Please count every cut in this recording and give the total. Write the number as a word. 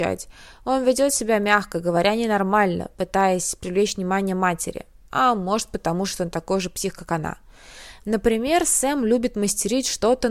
zero